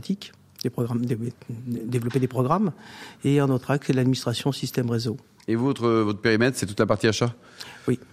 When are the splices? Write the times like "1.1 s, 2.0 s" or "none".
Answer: none